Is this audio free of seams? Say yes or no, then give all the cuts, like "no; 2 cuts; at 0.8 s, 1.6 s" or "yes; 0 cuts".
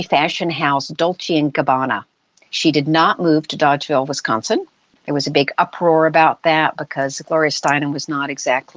no; 2 cuts; at 2.5 s, 5.0 s